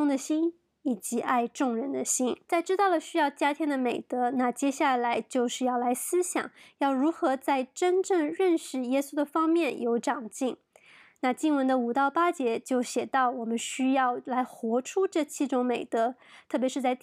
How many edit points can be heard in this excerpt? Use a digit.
1